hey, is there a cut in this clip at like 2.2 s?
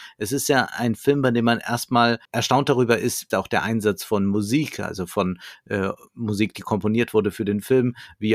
yes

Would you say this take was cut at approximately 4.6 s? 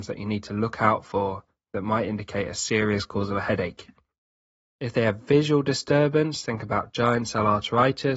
yes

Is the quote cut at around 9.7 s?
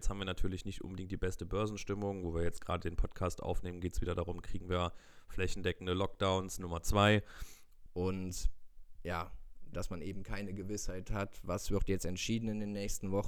yes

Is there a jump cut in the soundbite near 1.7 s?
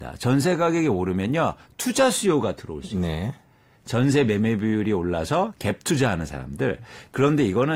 no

